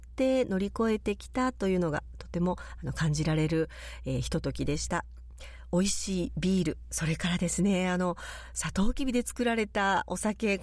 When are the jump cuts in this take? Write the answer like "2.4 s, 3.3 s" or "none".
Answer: none